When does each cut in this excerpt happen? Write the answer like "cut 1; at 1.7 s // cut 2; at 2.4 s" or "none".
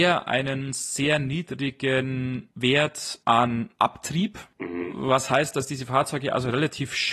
none